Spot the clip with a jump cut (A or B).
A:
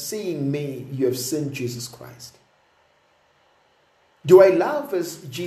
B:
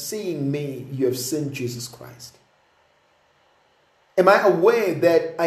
B